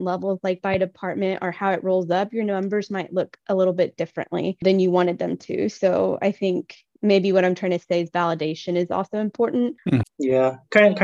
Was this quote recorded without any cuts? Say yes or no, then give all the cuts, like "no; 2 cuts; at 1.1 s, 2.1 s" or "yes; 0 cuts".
no; 1 cut; at 10.0 s